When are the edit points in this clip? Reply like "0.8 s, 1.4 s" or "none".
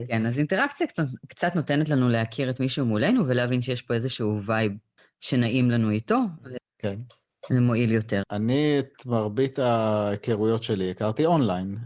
6.6 s, 8.2 s